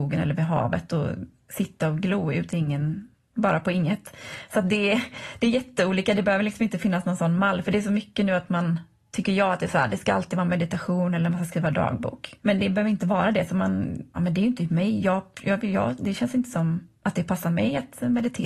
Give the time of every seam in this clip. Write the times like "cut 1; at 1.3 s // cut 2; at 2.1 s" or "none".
cut 1; at 4.5 s // cut 2; at 12.4 s // cut 3; at 14.2 s